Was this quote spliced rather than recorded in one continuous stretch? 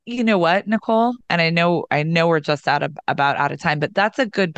no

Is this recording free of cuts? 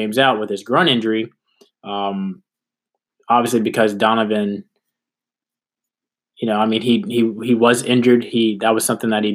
yes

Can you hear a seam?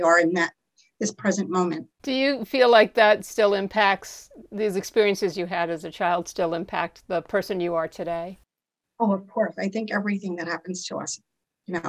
yes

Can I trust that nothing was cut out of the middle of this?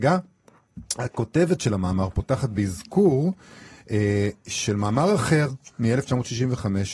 yes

